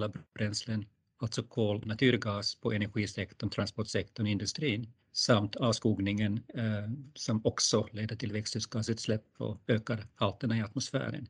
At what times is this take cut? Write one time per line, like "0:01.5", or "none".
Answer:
0:01.8
0:05.0

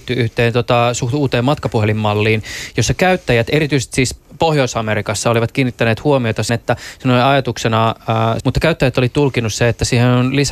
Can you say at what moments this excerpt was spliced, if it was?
0:06.5
0:08.4

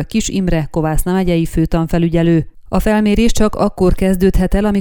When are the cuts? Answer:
none

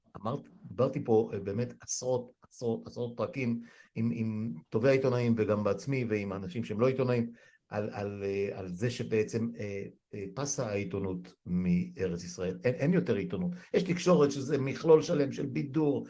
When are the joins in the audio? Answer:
none

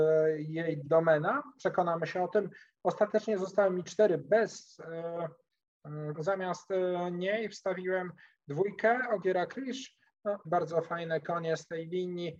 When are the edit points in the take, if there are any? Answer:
0:06.1
0:10.4

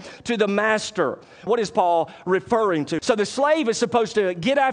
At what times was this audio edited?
0:01.5
0:03.0

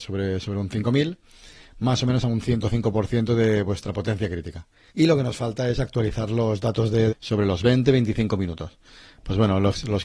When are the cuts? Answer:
0:04.9
0:07.1

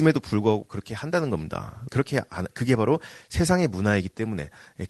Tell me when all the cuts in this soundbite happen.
0:01.9

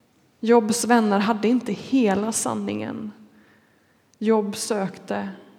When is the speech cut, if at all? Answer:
none

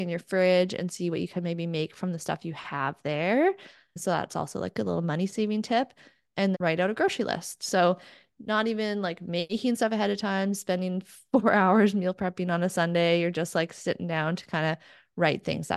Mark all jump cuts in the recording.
0:06.5

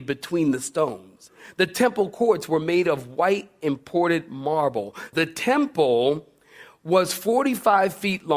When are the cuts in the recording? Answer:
0:05.1

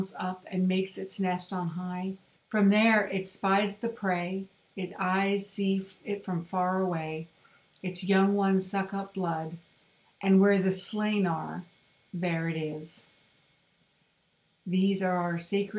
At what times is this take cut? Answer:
0:02.4

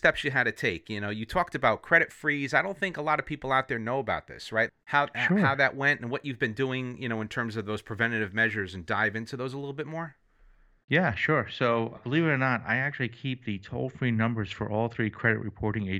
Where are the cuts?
0:04.7
0:12.0

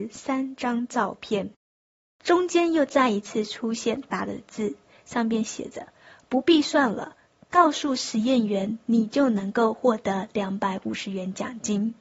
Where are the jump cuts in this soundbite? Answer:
0:04.1

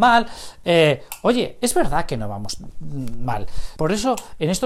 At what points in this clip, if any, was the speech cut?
0:03.8

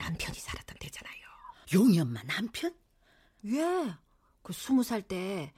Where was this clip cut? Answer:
0:01.6
0:03.4

